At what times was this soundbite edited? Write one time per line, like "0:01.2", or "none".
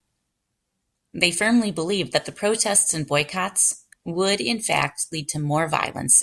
0:03.9